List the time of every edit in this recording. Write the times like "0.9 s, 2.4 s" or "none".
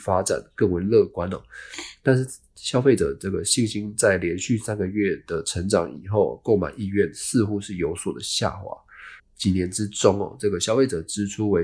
9.2 s